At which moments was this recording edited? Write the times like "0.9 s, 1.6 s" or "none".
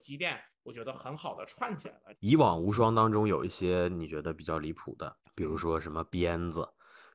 2.2 s, 5.2 s

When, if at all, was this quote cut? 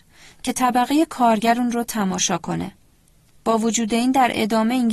none

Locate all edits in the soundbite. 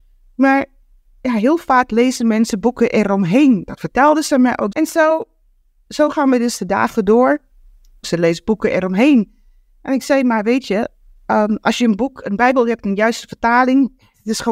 4.7 s, 8.0 s

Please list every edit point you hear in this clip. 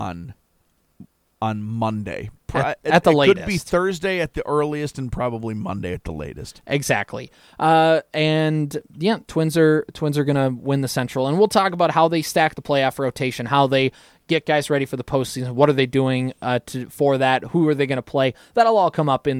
none

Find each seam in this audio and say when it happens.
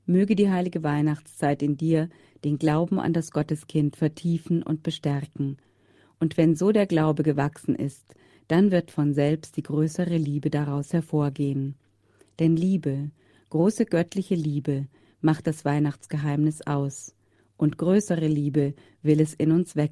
none

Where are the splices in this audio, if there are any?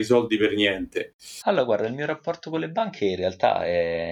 1.4 s

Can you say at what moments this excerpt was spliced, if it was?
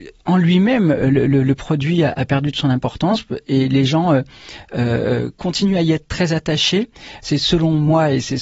7.2 s

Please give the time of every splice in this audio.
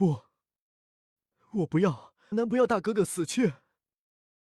2.3 s

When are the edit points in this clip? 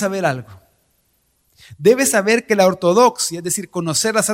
none

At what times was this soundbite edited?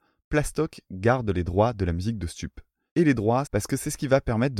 3.5 s

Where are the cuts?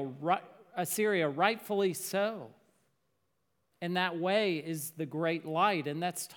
3.7 s

